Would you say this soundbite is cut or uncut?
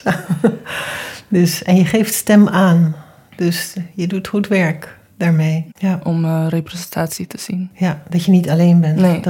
cut